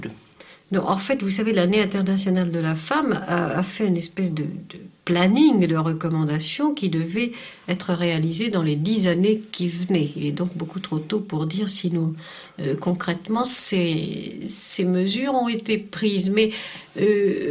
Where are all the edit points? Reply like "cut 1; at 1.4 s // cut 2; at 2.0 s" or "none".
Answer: none